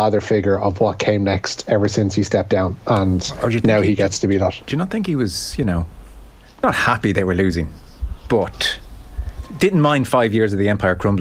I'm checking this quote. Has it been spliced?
no; 0 cuts

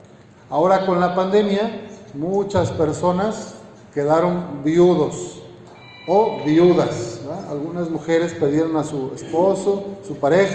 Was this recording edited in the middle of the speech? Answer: no; 0 cuts

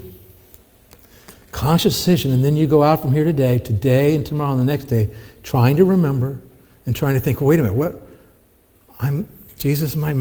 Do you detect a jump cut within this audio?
no; 0 cuts

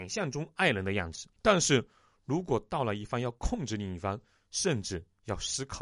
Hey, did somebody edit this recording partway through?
yes; 2 cuts; at 1.4 s, 4.4 s

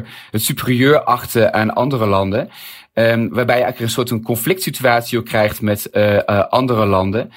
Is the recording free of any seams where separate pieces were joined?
yes; 0 cuts

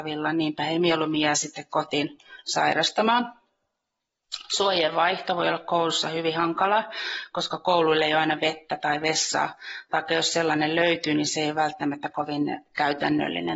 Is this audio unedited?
yes; 0 cuts

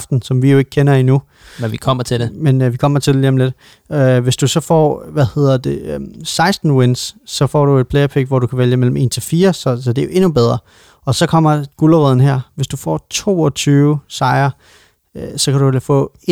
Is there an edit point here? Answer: no; 0 cuts

